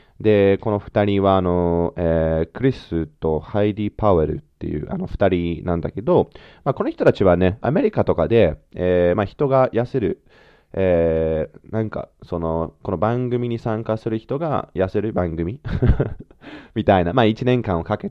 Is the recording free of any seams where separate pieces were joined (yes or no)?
no